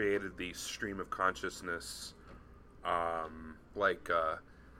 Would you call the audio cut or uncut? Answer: cut